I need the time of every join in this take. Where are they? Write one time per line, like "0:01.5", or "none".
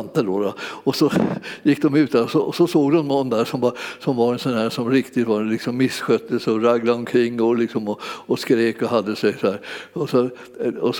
none